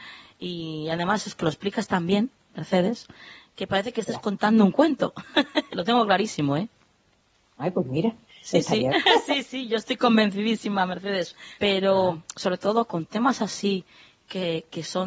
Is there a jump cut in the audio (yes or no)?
yes